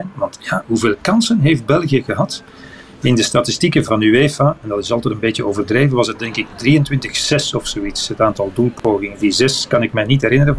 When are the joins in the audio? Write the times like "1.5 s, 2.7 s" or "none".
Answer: 3.9 s